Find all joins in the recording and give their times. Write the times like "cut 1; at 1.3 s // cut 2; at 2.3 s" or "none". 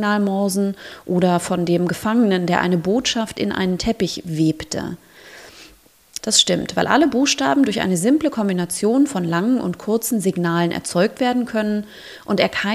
cut 1; at 6.2 s